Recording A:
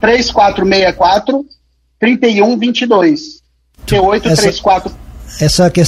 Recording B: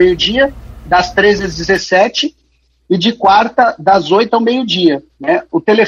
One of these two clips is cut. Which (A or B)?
A